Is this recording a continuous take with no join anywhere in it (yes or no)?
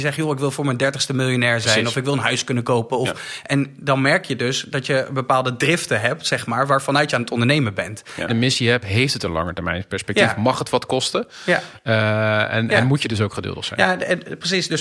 no